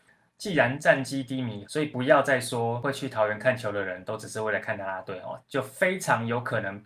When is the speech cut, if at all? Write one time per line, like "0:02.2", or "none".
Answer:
0:01.6
0:05.4

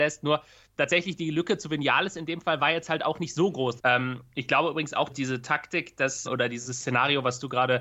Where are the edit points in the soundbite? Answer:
0:03.8
0:05.1
0:06.2

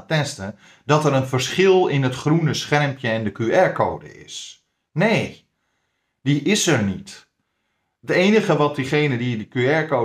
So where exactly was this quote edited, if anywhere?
none

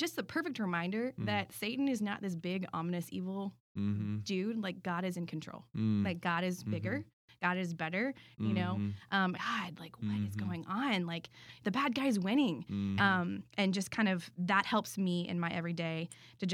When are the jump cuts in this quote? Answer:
0:08.3
0:09.3
0:13.0

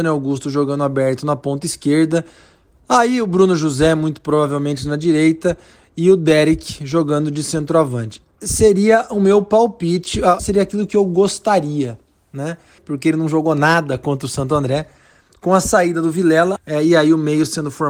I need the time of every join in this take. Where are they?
0:10.4
0:12.8
0:16.6

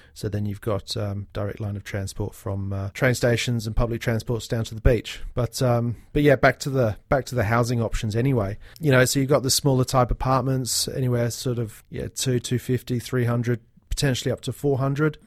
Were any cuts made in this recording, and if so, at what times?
none

